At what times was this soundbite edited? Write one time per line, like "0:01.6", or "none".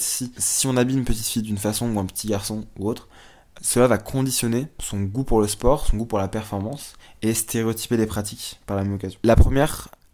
0:03.6